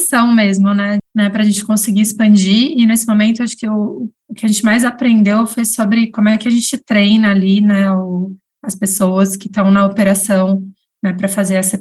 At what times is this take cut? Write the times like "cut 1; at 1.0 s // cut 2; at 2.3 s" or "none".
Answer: cut 1; at 1.0 s